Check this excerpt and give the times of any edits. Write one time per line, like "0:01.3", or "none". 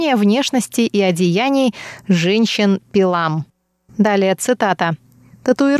none